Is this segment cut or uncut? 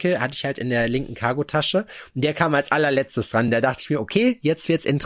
uncut